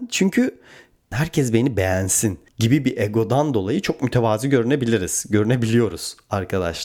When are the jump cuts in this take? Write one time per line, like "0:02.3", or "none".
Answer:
0:01.1
0:02.5